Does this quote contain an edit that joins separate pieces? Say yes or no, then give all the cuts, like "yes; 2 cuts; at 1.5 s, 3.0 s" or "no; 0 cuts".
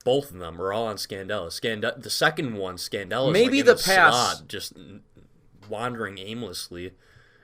no; 0 cuts